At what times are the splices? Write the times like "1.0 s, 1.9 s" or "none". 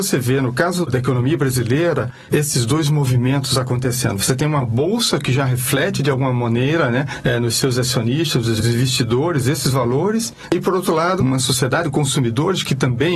11.2 s